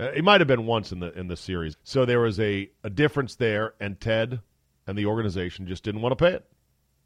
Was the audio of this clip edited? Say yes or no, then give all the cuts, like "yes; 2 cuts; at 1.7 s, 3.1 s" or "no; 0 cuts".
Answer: yes; 1 cut; at 1.7 s